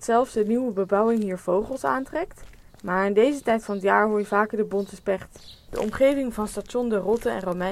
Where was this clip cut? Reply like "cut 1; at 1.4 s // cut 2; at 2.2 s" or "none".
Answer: cut 1; at 2.7 s // cut 2; at 5.7 s